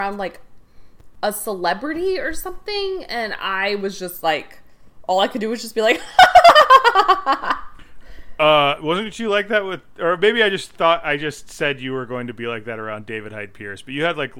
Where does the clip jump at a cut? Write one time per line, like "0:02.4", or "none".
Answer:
none